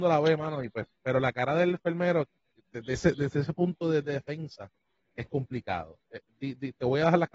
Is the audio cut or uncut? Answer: uncut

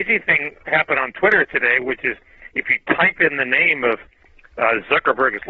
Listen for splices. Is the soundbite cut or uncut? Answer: uncut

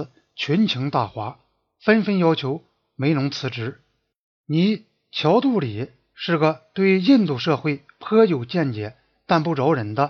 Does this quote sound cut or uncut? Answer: uncut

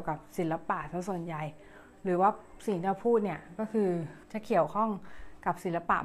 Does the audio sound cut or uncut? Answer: cut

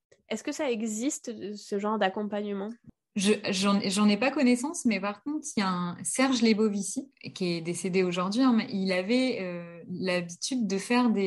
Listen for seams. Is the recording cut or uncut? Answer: uncut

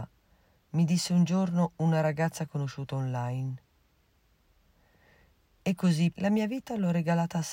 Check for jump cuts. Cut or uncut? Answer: cut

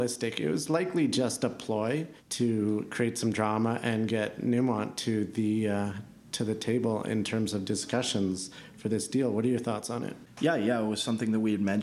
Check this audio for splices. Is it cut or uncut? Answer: uncut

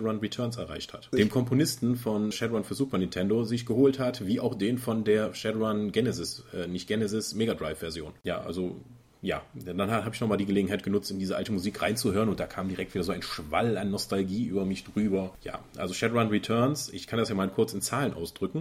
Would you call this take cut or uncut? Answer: cut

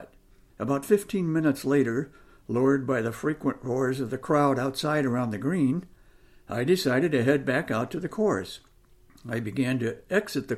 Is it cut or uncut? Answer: uncut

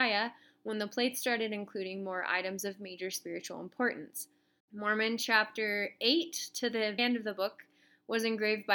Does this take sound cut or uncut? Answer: cut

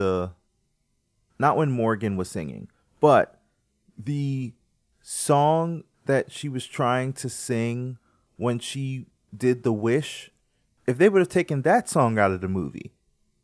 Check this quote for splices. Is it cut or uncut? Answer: uncut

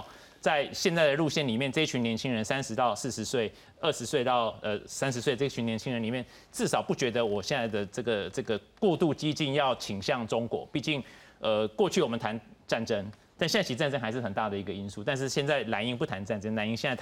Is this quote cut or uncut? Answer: uncut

